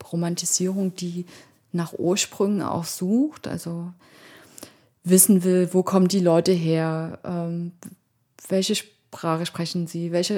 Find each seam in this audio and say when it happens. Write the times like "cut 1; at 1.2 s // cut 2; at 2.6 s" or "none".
none